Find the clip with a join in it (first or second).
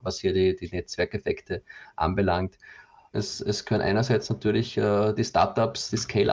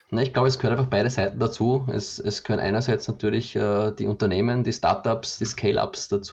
first